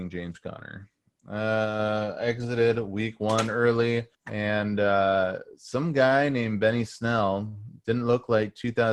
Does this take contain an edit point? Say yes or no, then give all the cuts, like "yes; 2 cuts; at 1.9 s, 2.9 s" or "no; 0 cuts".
yes; 1 cut; at 4.1 s